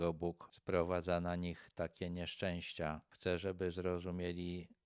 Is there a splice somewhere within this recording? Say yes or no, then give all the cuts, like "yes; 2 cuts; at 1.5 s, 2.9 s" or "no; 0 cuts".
no; 0 cuts